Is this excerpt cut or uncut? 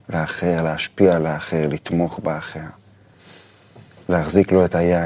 uncut